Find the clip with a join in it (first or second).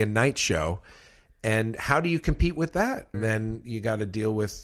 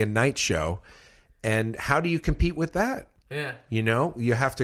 first